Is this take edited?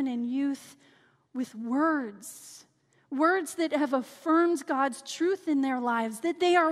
no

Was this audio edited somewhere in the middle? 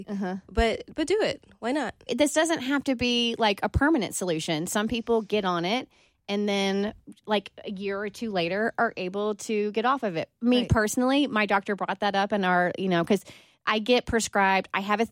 yes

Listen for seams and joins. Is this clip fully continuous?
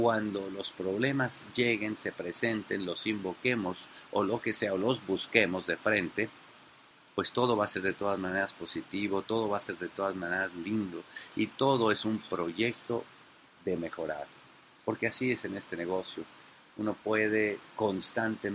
yes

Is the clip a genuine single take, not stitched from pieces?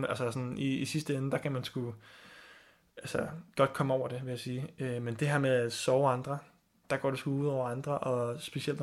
yes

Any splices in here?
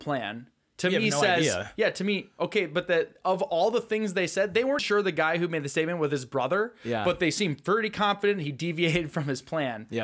yes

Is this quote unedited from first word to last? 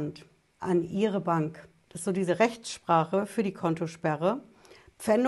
no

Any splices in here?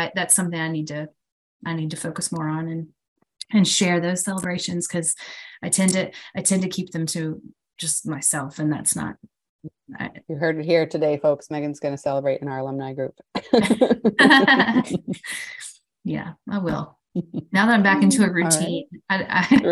yes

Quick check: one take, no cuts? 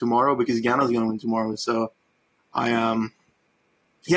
yes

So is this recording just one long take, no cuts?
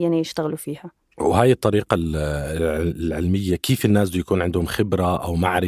yes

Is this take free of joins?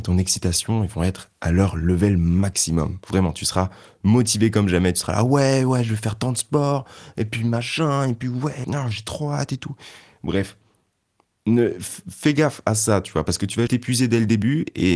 no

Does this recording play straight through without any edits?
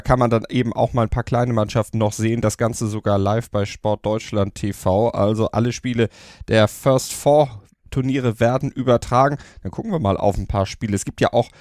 yes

